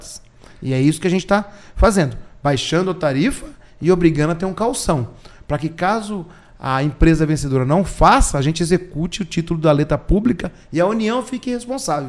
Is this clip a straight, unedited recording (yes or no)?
yes